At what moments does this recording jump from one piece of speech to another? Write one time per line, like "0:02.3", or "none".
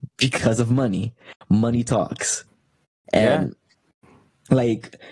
none